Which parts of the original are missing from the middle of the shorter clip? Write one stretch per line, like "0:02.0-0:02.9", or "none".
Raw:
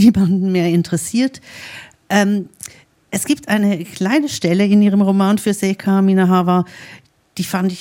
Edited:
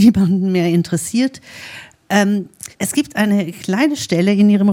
0:02.7-0:03.0